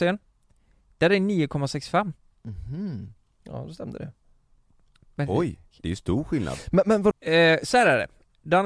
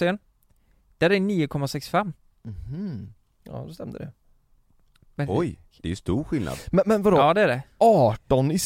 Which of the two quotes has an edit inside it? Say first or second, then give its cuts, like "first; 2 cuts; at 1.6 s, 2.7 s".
first; 1 cut; at 7.1 s